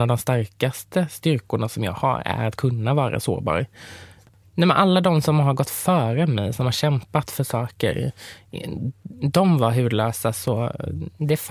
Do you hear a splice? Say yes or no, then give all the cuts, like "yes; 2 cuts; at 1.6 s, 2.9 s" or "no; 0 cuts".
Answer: no; 0 cuts